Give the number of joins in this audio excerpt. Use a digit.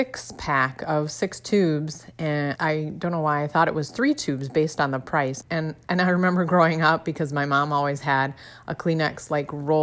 2